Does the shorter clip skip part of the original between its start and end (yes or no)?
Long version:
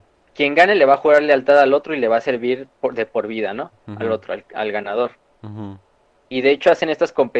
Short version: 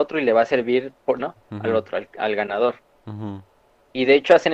yes